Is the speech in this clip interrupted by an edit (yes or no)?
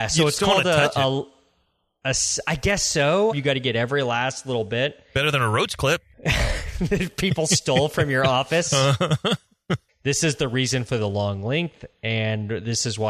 yes